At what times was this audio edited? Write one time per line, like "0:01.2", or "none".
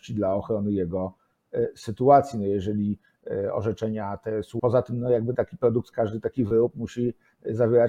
0:04.6
0:05.9